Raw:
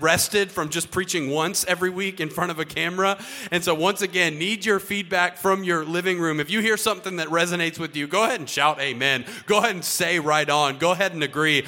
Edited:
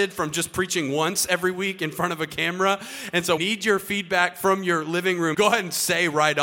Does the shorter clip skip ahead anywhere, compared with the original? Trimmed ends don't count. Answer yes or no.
yes